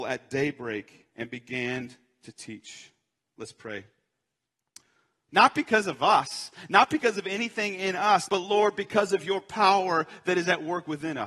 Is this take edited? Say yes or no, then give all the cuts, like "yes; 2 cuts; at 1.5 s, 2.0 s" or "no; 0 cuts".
yes; 2 cuts; at 5.3 s, 8.3 s